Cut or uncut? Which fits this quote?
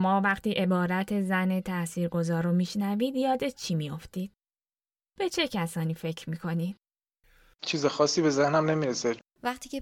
uncut